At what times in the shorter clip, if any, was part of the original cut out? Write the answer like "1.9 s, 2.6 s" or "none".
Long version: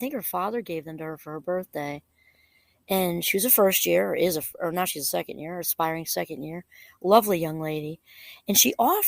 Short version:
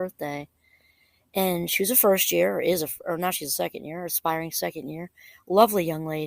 none